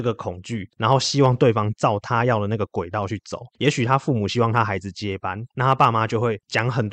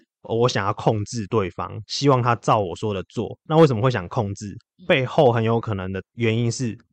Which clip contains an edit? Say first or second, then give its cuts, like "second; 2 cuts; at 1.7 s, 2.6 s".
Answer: first; 2 cuts; at 3.5 s, 5.5 s